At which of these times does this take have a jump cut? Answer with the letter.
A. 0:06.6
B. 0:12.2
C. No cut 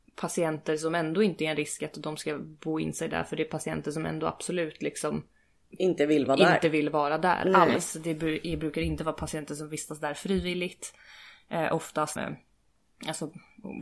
B